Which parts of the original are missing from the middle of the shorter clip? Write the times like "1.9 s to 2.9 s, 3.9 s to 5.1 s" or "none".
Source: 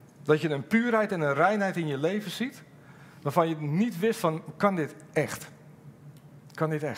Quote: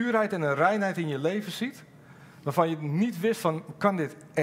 none